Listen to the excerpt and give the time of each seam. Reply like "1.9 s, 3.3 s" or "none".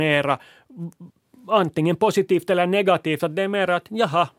none